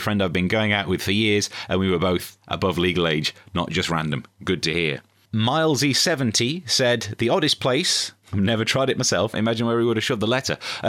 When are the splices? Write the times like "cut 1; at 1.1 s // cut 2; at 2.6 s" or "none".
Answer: cut 1; at 8.2 s // cut 2; at 9.3 s